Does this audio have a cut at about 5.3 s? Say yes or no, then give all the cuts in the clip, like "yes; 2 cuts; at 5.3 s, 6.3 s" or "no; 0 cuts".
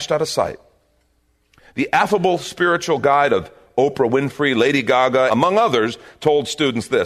yes; 1 cut; at 5.3 s